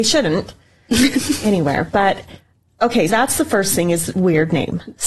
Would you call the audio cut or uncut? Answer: cut